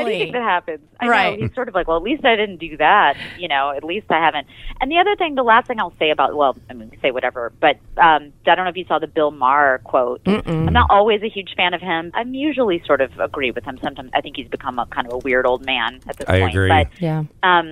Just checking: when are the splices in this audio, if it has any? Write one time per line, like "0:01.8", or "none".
0:12.1
0:14.1